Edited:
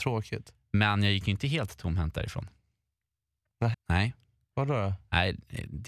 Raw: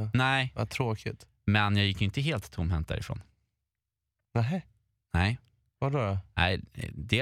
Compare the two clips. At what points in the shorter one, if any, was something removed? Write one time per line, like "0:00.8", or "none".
0:03.7